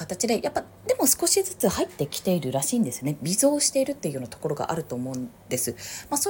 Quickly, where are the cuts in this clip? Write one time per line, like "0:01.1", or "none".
none